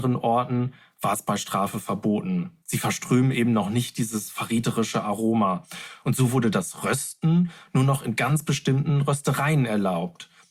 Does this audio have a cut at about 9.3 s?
no; 2 cuts; at 2.6 s, 6.0 s

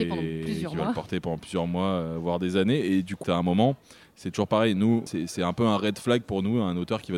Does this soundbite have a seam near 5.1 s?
yes; 2 cuts; at 3.2 s, 5.1 s

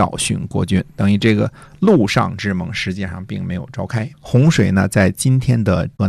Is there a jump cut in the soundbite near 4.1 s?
yes; 1 cut; at 4.1 s

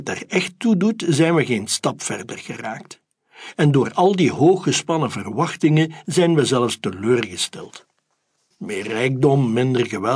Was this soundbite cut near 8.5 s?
yes; 1 cut; at 8.5 s

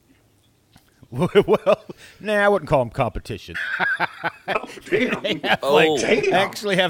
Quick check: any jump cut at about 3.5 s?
yes; 1 cut; at 3.5 s

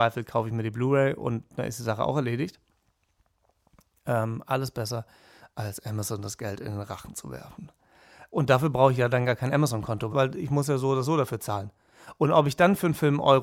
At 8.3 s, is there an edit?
yes; 2 cuts; at 8.3 s, 10.1 s

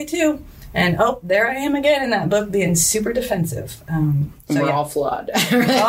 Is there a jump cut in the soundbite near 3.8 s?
no; 0 cuts

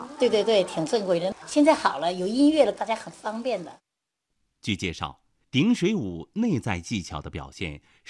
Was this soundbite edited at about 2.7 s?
yes; 1 cut; at 2.7 s

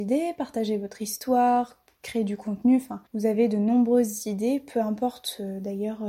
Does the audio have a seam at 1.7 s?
no; 1 cut; at 3.1 s

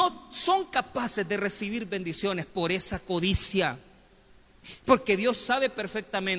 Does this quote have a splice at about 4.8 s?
yes; 1 cut; at 4.8 s

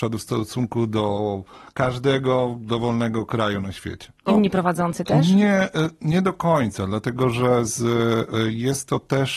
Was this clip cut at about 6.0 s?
no; 1 cut; at 4.3 s

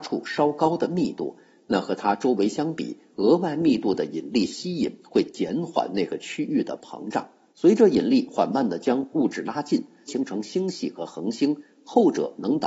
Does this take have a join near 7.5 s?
yes; 2 cuts; at 7.5 s, 10.1 s

